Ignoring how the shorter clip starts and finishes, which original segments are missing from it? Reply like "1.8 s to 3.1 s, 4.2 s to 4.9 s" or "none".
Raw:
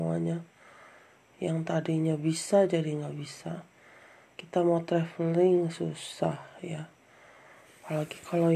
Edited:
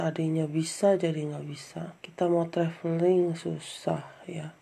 3.7 s to 4.3 s